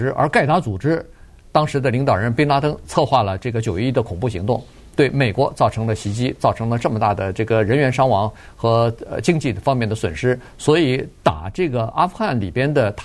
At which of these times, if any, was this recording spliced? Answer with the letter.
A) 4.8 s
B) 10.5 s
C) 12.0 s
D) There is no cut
D